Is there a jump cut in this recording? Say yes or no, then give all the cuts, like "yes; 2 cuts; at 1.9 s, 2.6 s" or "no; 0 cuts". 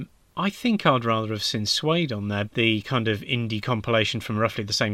yes; 1 cut; at 2.5 s